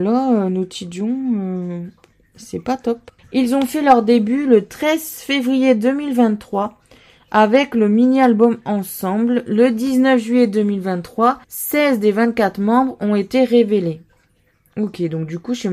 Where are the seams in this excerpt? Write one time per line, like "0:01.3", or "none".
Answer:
0:03.2
0:11.4